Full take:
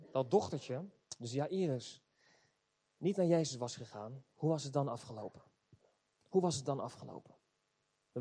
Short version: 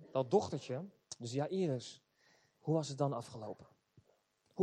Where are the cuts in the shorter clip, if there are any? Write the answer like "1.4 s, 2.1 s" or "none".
2.5 s